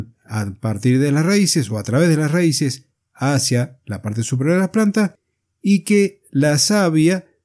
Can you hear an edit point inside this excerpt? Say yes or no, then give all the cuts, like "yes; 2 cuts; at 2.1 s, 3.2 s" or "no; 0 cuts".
no; 0 cuts